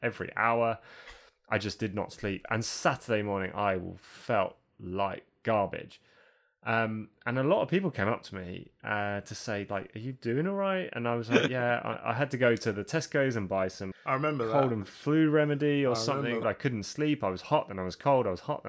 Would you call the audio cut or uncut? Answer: cut